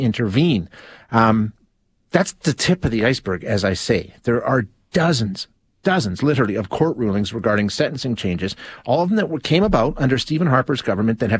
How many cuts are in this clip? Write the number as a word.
zero